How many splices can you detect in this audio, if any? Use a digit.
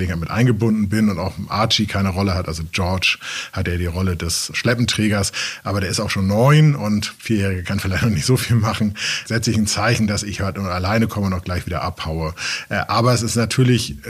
0